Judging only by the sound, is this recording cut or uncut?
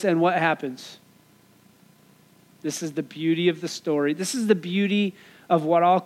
uncut